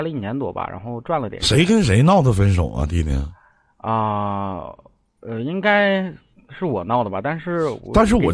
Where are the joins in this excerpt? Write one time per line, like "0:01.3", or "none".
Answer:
none

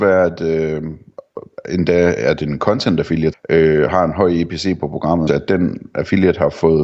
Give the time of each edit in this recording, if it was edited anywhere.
0:03.3
0:05.3

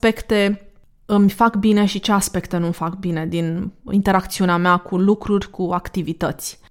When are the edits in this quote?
0:03.9

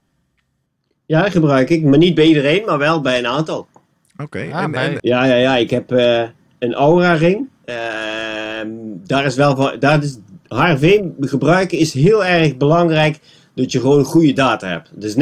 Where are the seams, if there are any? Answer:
0:05.0
0:07.6

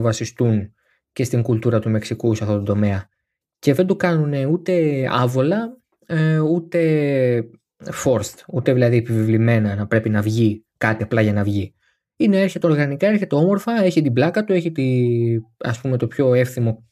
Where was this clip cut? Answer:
none

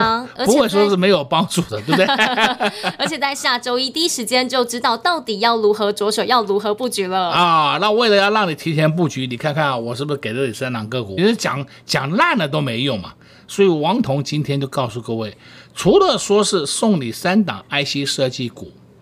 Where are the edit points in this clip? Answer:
0:11.2

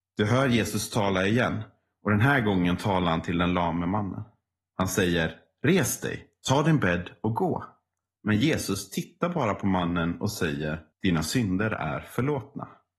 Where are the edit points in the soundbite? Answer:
0:08.2
0:10.9

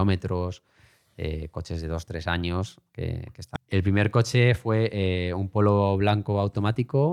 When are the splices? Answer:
0:03.6

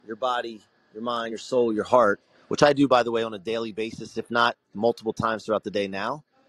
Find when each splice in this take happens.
none

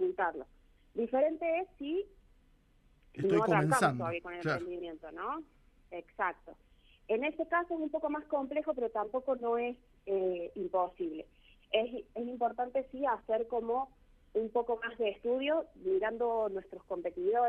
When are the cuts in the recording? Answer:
none

